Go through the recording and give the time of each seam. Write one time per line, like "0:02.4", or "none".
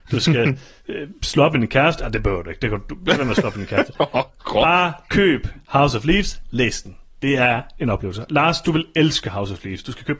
none